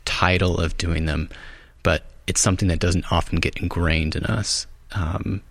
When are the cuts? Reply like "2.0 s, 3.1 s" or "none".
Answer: none